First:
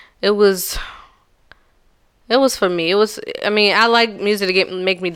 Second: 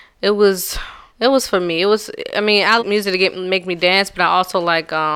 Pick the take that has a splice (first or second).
second